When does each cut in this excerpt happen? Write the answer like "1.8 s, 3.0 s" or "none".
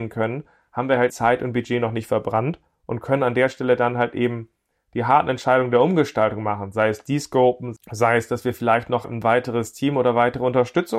1.1 s, 7.8 s